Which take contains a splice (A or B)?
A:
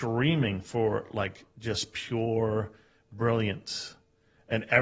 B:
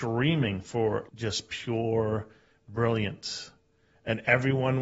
B